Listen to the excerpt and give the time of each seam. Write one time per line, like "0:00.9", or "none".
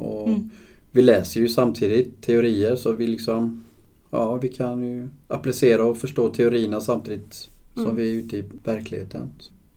none